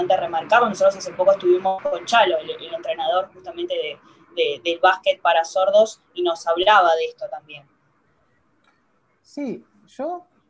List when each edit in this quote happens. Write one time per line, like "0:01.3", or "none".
none